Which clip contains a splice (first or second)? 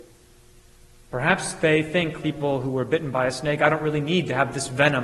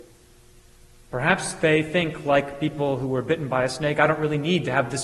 first